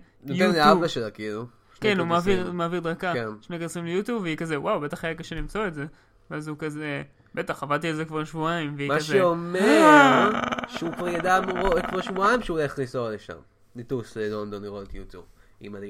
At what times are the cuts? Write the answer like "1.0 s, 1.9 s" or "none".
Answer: none